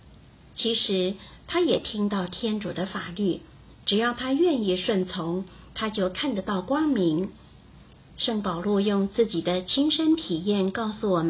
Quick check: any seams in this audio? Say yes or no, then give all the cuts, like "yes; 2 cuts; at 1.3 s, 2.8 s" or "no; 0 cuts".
yes; 2 cuts; at 1.4 s, 8.1 s